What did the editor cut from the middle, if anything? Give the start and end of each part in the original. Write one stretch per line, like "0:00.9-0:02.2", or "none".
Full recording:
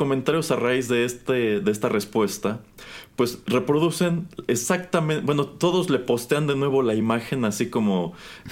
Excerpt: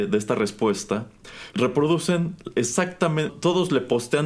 0:03.1-0:03.4
0:05.2-0:05.5